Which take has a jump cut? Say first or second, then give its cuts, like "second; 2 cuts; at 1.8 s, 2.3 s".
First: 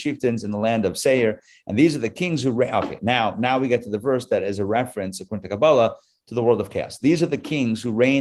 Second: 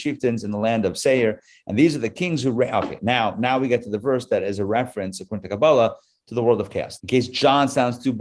second; 1 cut; at 7.0 s